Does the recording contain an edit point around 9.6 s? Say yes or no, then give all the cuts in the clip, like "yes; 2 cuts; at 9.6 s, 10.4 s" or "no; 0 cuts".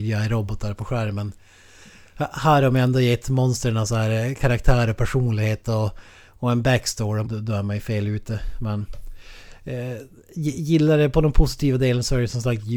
no; 1 cut; at 7.2 s